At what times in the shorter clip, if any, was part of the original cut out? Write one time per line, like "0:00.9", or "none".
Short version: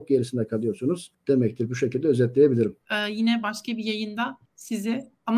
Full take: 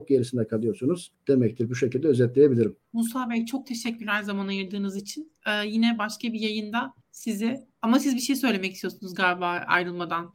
0:02.8